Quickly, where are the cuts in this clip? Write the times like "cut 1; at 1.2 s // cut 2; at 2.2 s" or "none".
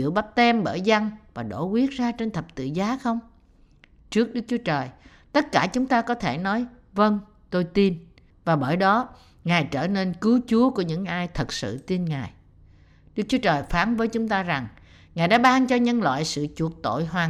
cut 1; at 8.3 s